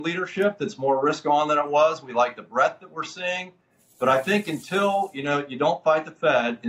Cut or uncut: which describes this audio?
uncut